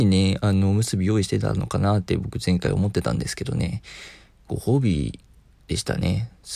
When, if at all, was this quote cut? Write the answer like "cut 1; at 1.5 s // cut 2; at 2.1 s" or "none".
none